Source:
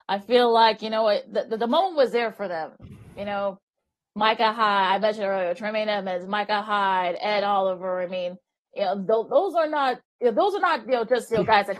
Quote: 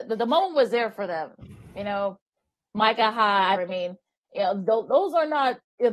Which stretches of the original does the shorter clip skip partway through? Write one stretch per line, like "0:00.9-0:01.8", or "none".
0:05.0-0:08.0

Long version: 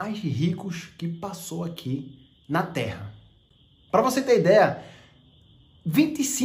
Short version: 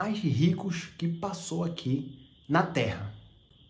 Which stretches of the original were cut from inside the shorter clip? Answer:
none

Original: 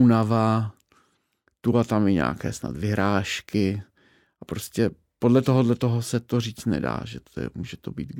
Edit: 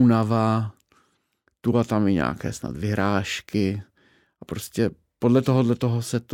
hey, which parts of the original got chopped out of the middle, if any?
none

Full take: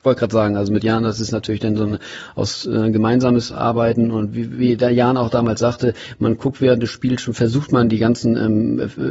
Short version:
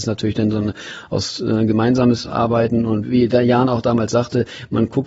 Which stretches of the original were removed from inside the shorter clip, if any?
0:04.3-0:04.5

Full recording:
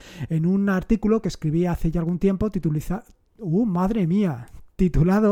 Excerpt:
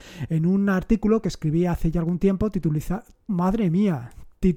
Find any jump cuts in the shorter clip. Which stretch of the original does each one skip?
0:03.3-0:03.7

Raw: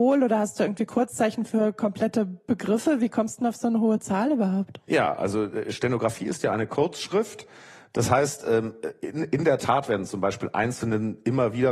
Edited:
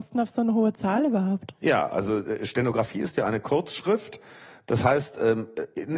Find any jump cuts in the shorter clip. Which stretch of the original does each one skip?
none

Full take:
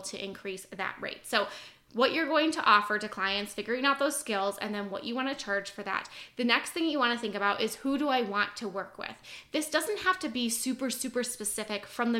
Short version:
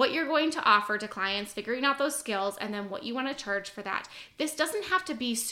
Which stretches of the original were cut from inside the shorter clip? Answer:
0:06.3-0:09.5

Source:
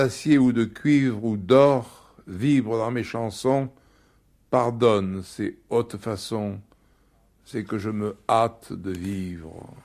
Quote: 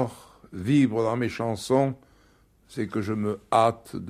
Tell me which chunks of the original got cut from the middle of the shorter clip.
0:04.3-0:07.3

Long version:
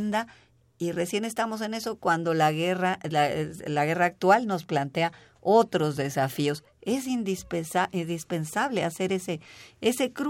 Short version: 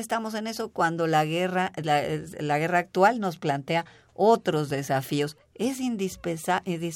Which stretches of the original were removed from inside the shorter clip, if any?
none

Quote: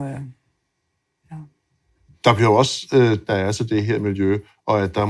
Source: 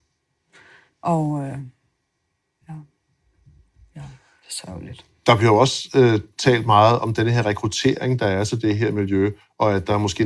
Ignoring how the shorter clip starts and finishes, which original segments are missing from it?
0:03.5-0:05.2
0:06.3-0:08.2

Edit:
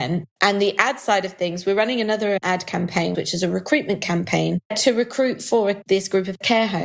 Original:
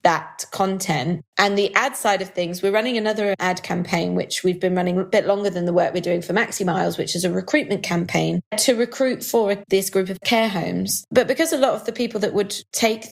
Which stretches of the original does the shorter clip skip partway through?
0:04.1-0:07.0

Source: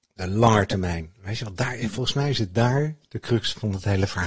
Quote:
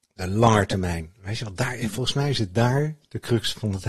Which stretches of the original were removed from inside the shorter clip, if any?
none

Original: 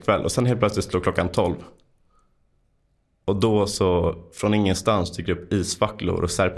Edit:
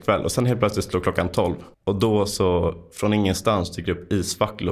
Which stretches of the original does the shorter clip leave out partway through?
0:01.7-0:03.1

